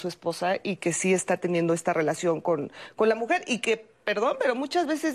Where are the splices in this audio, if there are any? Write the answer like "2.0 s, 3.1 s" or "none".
none

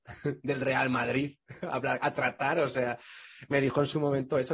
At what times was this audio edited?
none

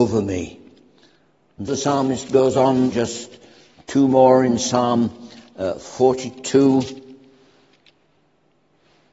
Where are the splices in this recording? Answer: 1.7 s, 2.9 s

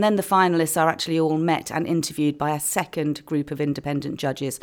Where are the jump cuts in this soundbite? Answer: none

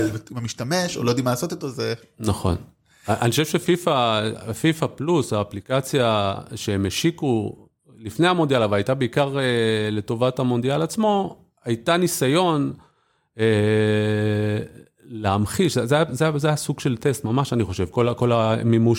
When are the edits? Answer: none

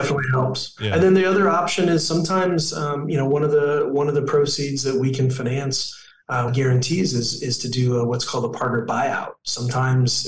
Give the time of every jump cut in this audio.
6.5 s

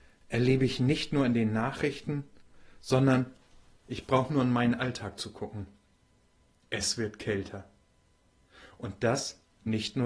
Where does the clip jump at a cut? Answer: none

